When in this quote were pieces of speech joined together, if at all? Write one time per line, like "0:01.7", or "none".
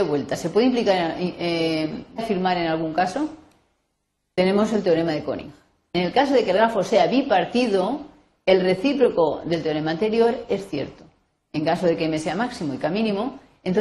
0:02.2